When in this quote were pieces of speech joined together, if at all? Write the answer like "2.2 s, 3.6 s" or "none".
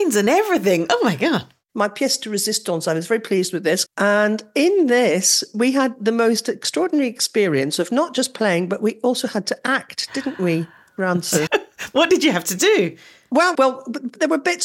3.9 s, 11.5 s, 13.5 s